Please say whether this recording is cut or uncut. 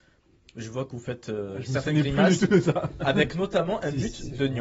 uncut